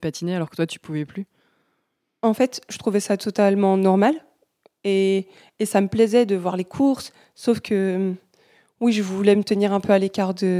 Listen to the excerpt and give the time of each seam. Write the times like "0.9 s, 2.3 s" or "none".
none